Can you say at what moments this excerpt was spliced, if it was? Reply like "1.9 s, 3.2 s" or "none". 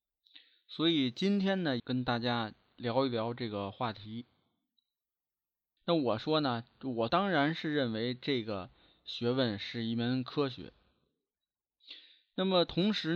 1.8 s, 5.8 s